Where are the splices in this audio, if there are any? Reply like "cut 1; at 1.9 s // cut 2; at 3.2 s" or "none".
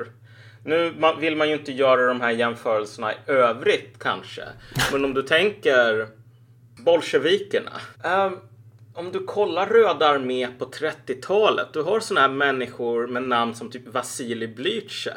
cut 1; at 7.9 s